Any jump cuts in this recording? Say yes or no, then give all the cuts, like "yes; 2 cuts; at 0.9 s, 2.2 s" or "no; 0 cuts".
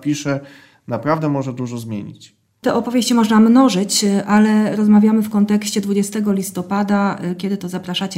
no; 0 cuts